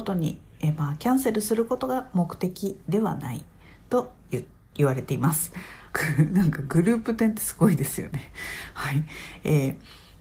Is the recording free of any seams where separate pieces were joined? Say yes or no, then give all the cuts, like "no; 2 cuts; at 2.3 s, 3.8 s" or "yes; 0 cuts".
no; 1 cut; at 5.9 s